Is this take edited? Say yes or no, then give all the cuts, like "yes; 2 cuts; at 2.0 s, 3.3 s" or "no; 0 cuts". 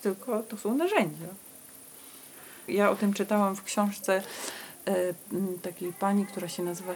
yes; 1 cut; at 2.7 s